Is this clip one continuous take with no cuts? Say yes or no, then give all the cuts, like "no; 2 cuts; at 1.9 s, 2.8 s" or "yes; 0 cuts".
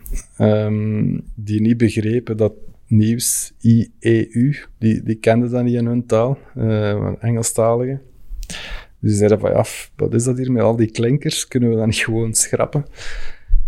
yes; 0 cuts